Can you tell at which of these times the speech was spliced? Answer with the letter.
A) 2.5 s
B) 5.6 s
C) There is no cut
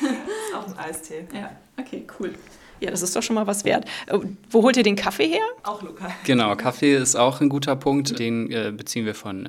B